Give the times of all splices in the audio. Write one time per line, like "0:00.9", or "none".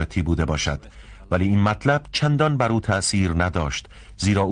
none